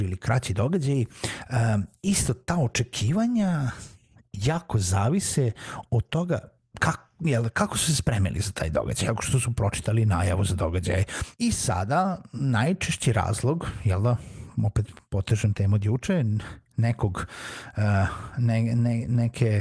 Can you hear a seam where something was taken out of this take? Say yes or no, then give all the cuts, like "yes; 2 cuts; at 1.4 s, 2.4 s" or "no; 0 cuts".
yes; 2 cuts; at 9.1 s, 11.3 s